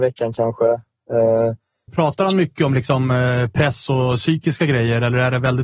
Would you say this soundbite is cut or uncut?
cut